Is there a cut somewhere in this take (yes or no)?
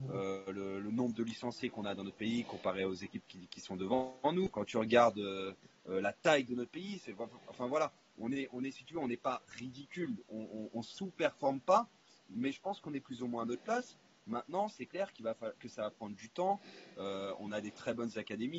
no